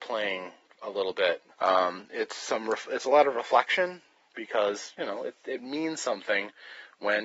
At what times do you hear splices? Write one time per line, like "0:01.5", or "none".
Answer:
0:01.5